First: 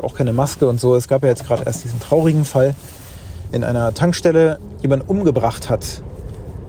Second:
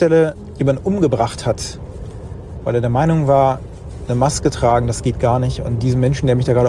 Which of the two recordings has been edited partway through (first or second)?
first